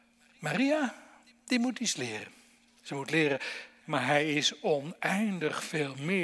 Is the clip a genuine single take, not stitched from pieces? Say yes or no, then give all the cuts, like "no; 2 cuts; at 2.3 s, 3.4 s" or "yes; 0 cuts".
no; 1 cut; at 3.8 s